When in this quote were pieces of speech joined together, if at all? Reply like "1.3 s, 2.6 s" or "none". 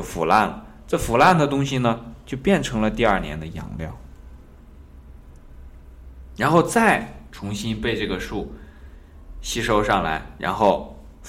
none

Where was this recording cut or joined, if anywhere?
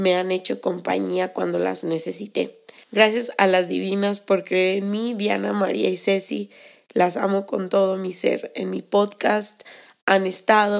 2.8 s

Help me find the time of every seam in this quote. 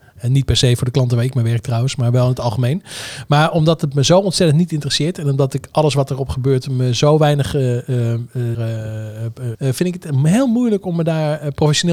8.5 s, 9.5 s

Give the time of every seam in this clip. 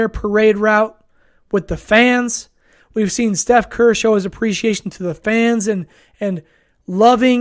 none

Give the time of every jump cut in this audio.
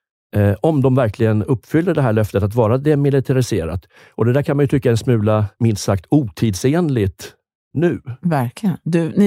5.6 s

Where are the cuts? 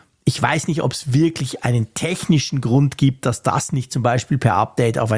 none

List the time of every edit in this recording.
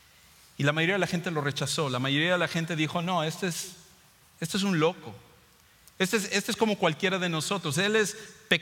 none

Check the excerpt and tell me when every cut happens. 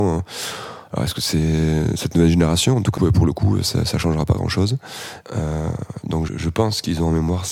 3.0 s, 5.2 s, 6.3 s

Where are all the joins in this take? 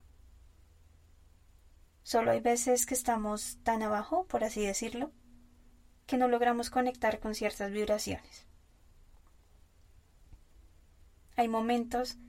none

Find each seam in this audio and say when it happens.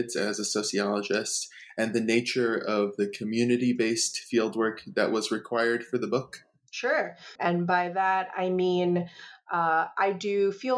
7.4 s

